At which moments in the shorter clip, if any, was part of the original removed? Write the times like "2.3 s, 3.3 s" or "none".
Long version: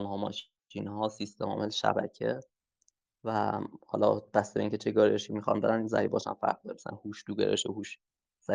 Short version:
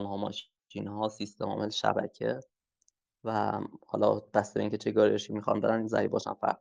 none